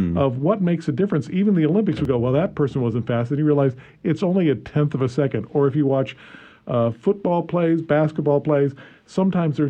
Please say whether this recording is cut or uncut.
uncut